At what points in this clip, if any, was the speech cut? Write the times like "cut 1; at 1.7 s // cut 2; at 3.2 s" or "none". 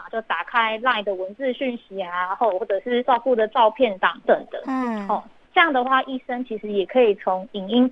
cut 1; at 4.2 s